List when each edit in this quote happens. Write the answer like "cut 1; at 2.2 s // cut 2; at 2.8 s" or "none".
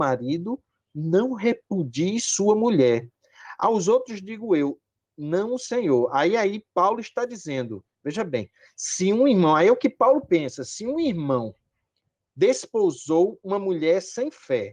none